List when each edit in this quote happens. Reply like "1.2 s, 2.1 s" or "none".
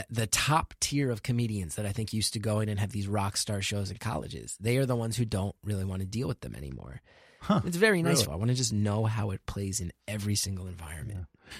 8.2 s